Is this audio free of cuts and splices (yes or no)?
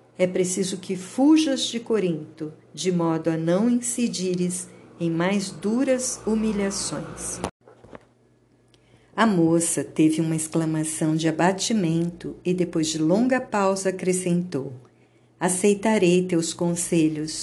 no